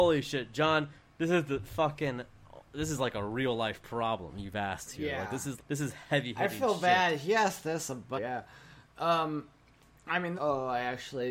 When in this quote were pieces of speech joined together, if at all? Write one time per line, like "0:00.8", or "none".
0:05.6
0:08.1
0:10.3